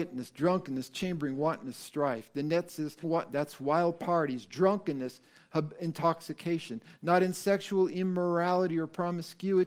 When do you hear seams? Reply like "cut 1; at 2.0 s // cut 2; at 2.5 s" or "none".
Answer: cut 1; at 3.0 s